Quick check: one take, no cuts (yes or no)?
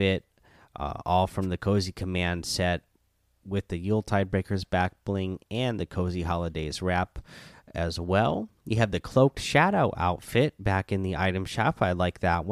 yes